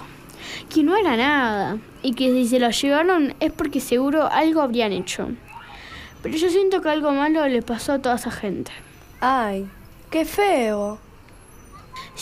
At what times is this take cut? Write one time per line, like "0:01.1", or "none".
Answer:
none

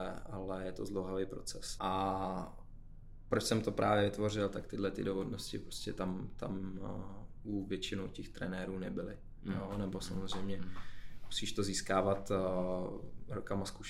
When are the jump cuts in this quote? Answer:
0:01.8

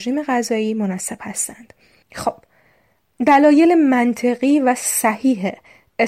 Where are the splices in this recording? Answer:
0:02.0

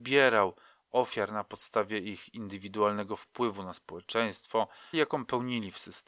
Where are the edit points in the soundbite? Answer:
0:04.9

